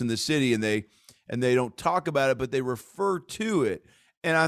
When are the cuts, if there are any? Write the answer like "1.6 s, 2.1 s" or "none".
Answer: none